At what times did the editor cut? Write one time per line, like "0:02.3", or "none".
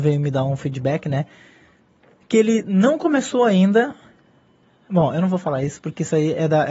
none